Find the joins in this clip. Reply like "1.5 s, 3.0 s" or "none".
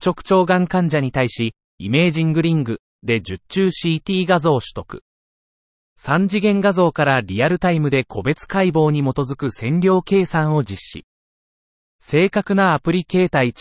1.7 s